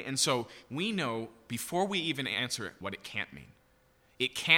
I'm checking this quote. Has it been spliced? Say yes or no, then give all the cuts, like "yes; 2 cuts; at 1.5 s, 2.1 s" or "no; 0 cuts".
yes; 1 cut; at 2.8 s